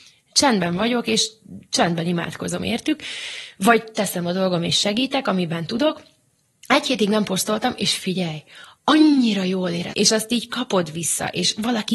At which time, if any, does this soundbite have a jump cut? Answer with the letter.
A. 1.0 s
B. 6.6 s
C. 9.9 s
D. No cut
C